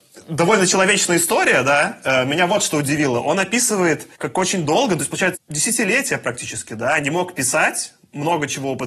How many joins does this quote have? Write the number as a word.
two